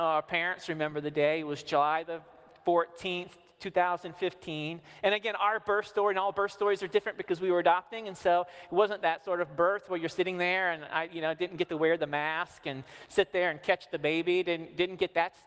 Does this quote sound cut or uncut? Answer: uncut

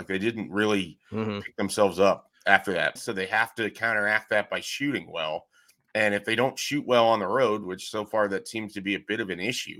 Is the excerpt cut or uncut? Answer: cut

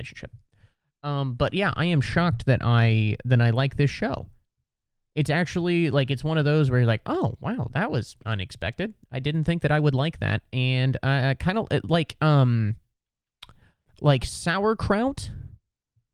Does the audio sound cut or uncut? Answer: uncut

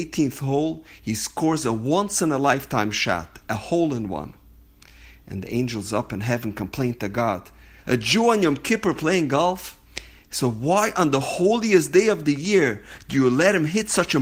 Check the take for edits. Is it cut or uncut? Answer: cut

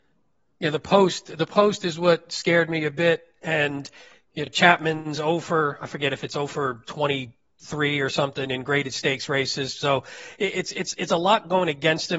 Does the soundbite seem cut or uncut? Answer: uncut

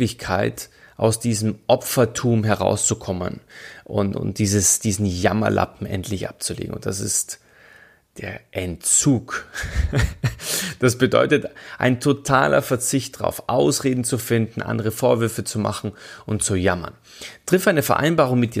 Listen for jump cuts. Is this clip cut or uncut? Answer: cut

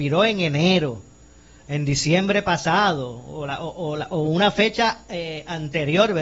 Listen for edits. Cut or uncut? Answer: uncut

